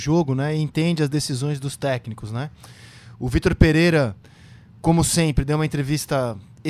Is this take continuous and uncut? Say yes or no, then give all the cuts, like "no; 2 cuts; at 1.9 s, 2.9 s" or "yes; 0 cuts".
yes; 0 cuts